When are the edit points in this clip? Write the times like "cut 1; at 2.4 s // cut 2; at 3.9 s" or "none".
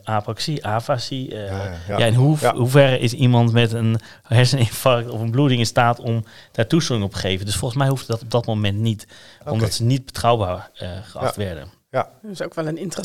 none